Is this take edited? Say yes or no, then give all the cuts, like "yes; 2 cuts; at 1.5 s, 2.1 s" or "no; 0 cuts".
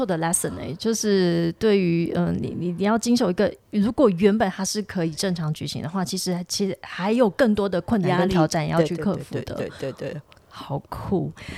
no; 0 cuts